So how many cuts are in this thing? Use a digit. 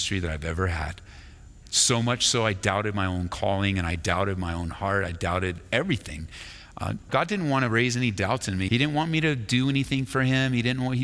2